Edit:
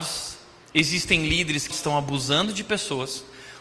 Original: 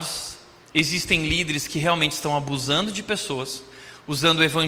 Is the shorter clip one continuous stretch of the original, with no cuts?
no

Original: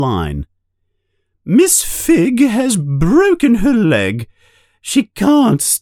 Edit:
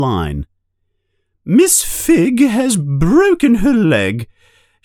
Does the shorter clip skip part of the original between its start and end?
no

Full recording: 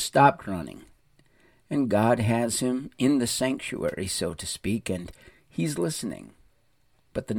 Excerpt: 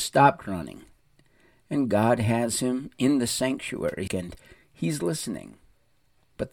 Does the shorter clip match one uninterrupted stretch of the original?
no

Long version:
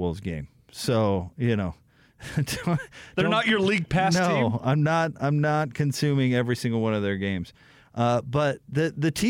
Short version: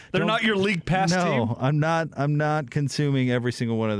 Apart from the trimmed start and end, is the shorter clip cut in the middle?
no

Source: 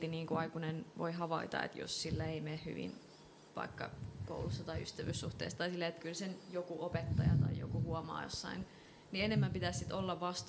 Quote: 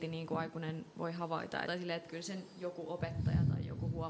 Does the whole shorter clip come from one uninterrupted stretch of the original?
no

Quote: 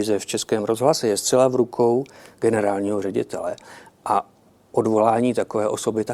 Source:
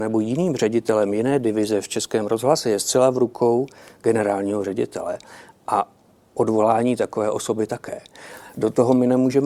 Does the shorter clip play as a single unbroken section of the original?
yes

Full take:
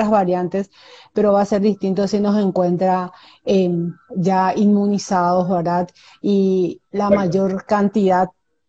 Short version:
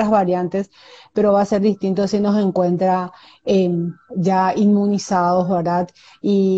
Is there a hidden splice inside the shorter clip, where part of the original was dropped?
no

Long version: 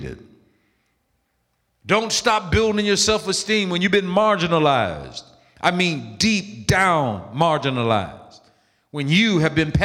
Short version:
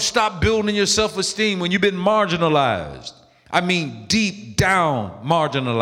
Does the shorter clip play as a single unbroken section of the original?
yes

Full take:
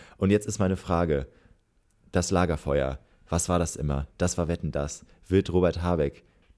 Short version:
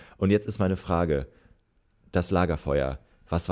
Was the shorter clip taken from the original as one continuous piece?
yes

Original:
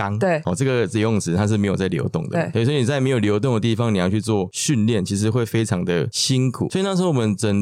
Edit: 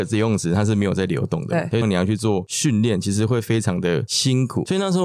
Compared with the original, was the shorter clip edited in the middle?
yes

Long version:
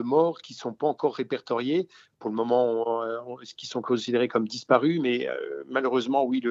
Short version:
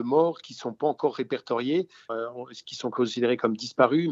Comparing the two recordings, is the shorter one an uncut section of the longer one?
no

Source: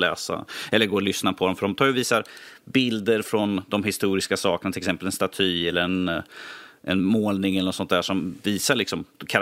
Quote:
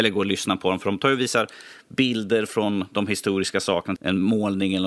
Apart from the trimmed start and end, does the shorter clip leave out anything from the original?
yes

